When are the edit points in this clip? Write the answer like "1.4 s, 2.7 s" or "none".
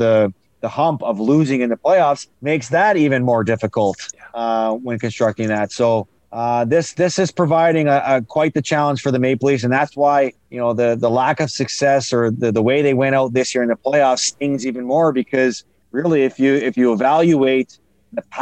none